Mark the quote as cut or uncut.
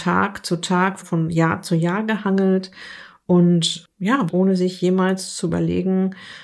cut